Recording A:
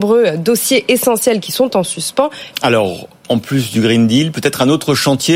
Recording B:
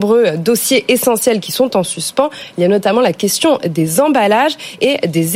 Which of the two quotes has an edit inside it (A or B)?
A